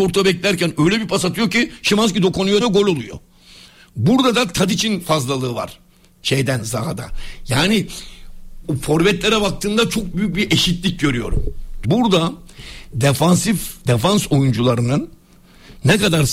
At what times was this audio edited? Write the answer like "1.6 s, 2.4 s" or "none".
2.6 s, 8.6 s, 11.8 s